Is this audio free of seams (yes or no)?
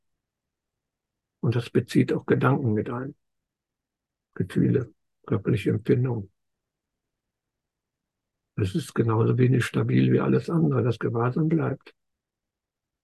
no